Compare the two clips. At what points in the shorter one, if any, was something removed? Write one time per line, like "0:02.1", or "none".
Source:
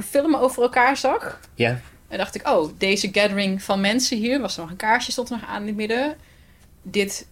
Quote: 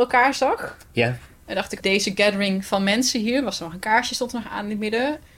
0:01.8